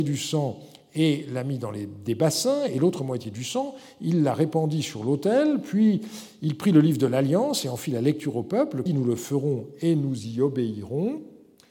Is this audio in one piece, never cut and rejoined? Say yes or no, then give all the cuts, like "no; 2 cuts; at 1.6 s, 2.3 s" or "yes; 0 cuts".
no; 1 cut; at 8.9 s